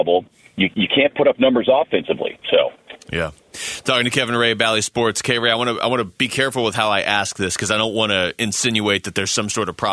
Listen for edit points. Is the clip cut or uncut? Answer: uncut